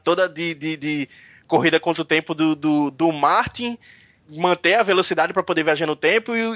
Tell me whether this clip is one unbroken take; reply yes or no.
yes